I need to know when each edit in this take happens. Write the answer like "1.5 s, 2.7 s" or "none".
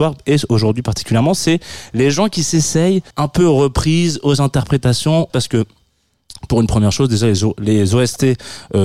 3.1 s, 5.3 s